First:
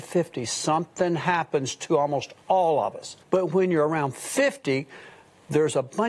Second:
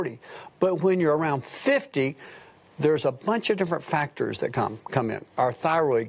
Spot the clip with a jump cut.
first; 1 cut; at 3.2 s

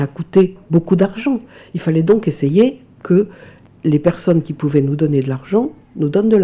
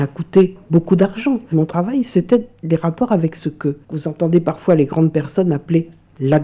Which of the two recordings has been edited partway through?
second; 2 cuts; at 1.5 s, 3.8 s

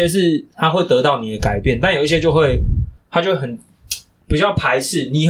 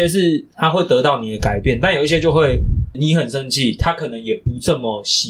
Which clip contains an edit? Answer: second; 1 cut; at 2.9 s

